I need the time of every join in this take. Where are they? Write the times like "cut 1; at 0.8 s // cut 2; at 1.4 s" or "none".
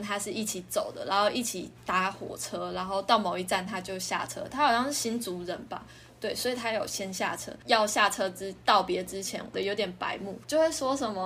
cut 1; at 9.5 s